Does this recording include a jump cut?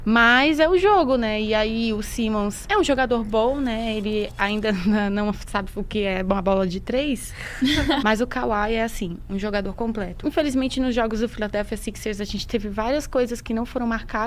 yes; 2 cuts; at 8.0 s, 10.2 s

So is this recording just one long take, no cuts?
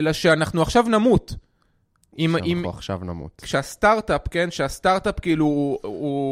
yes; 0 cuts

